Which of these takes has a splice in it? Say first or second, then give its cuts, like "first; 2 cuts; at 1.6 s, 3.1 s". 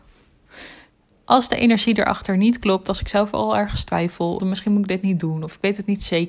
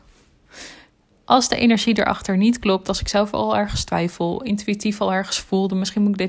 first; 1 cut; at 4.4 s